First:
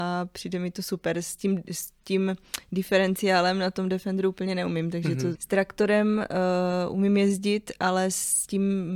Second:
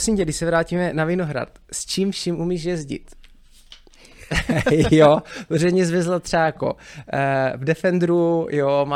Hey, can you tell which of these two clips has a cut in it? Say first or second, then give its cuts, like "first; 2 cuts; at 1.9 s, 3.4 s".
first; 1 cut; at 5.3 s